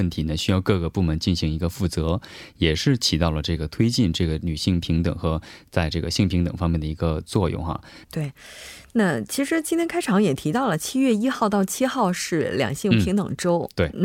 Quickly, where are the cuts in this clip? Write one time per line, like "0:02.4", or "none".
0:08.0